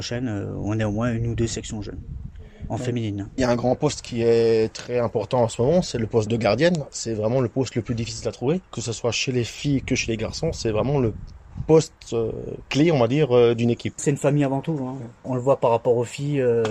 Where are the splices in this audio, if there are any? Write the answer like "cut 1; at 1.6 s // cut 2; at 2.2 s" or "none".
none